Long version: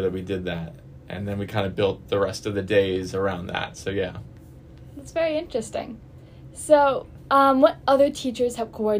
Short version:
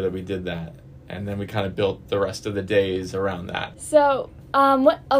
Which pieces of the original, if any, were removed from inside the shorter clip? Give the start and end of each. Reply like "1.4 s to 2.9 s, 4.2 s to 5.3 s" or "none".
3.7 s to 6.5 s